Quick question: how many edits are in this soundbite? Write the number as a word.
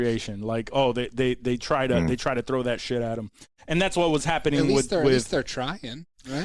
zero